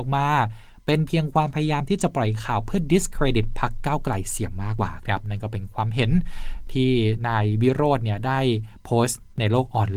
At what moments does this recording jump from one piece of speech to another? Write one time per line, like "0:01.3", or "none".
0:04.8